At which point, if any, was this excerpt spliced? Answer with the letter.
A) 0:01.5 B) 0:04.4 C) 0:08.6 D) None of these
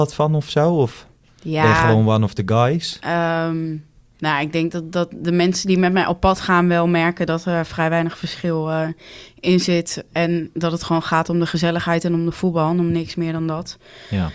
D